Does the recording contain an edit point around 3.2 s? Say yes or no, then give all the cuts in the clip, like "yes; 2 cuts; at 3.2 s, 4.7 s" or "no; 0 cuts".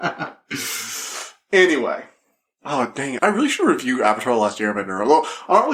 yes; 1 cut; at 3.2 s